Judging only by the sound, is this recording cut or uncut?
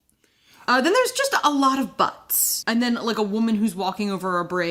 cut